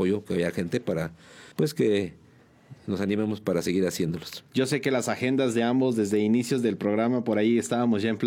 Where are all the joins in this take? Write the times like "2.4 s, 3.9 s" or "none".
1.5 s, 4.5 s